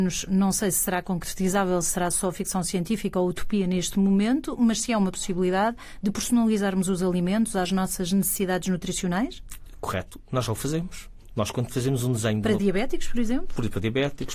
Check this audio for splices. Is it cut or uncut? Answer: uncut